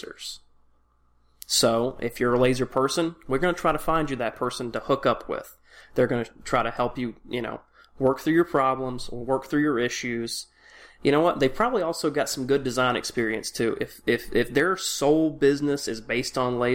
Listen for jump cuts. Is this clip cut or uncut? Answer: uncut